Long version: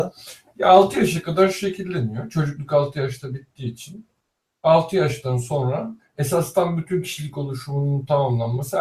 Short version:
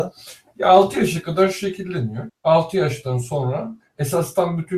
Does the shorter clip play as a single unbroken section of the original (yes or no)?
no